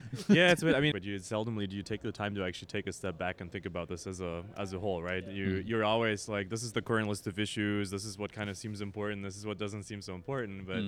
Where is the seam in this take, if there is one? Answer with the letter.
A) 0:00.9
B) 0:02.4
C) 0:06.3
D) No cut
A